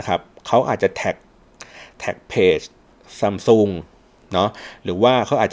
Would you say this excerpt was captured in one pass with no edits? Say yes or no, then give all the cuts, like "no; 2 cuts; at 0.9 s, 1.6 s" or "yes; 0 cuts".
yes; 0 cuts